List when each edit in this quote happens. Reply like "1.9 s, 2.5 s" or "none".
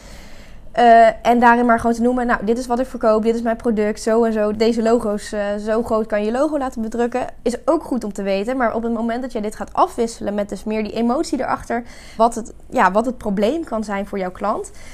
4.5 s, 12.2 s